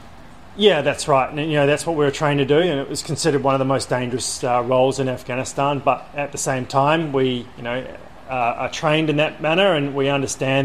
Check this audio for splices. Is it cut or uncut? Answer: uncut